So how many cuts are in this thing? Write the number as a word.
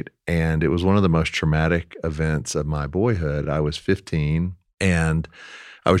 zero